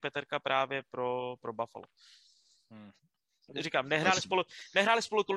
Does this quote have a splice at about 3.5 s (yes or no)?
yes